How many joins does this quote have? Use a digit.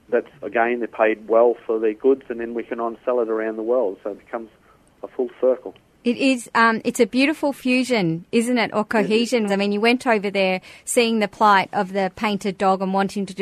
2